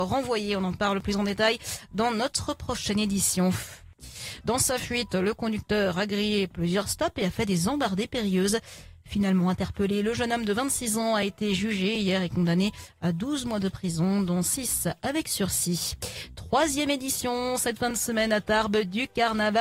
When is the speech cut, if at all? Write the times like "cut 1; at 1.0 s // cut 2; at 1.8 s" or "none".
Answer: cut 1; at 4.4 s